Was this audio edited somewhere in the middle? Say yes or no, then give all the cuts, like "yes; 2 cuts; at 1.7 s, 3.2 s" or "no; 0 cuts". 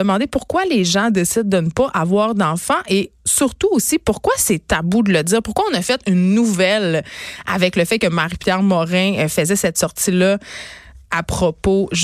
yes; 1 cut; at 3.2 s